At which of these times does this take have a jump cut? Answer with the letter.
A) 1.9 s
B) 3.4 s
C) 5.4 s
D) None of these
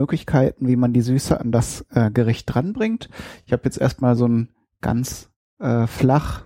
D